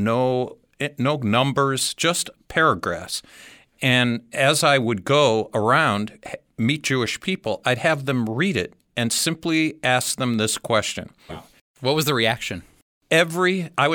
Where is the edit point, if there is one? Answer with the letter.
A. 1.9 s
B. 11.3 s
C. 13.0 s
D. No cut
B